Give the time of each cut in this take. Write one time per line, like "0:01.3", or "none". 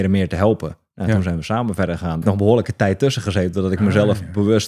0:02.2